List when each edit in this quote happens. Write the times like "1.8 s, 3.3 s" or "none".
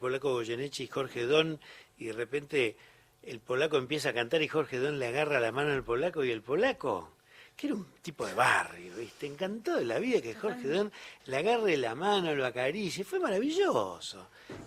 none